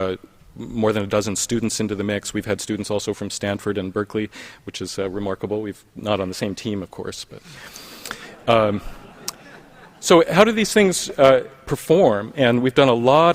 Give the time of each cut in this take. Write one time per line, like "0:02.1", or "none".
none